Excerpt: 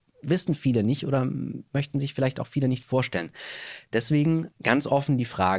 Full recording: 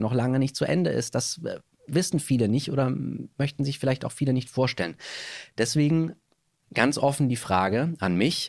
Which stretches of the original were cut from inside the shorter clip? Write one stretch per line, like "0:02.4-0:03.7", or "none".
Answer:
0:06.2-0:06.6